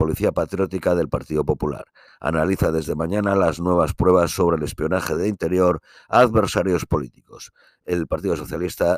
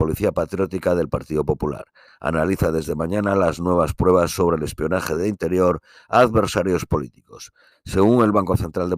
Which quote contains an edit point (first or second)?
second